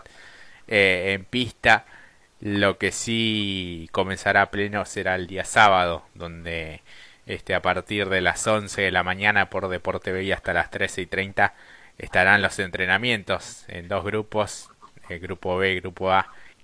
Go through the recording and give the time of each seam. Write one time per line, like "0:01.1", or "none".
none